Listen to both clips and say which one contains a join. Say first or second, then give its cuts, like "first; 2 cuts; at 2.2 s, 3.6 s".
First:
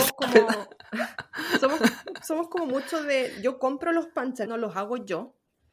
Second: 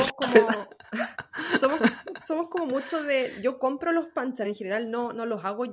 first; 1 cut; at 4.4 s